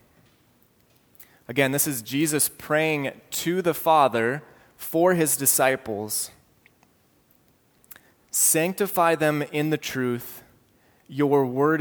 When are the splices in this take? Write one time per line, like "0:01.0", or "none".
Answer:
0:08.1